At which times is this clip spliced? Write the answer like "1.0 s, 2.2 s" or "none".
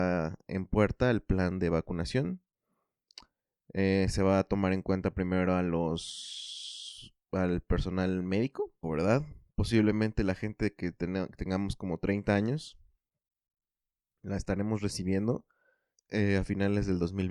8.8 s, 16.0 s